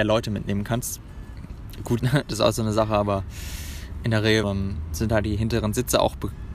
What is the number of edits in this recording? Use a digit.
2